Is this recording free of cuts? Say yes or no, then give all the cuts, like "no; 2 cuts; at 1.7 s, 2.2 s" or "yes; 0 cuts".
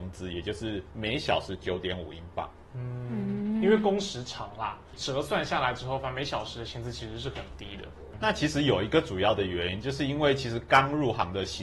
yes; 0 cuts